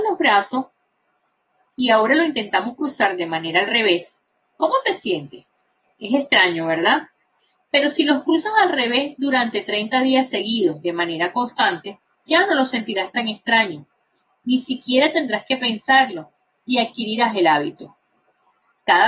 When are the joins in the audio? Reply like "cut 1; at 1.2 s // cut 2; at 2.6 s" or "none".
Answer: cut 1; at 12.3 s